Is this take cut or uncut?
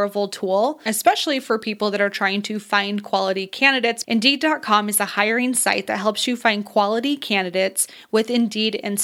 cut